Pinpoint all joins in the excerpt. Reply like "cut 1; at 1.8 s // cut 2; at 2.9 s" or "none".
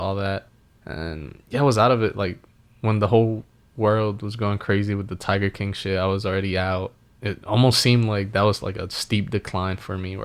none